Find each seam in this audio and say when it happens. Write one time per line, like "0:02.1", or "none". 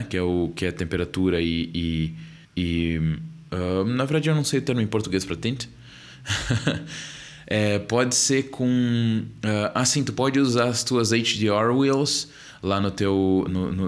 0:02.4